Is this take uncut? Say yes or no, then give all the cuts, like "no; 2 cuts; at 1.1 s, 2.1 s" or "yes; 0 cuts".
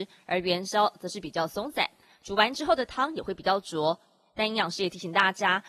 yes; 0 cuts